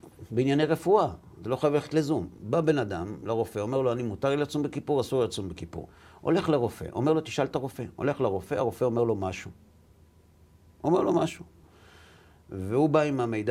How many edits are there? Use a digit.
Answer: 0